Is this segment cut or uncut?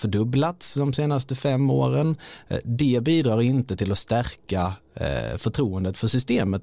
uncut